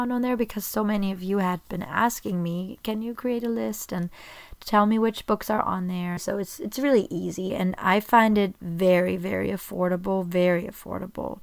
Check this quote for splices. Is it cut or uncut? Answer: cut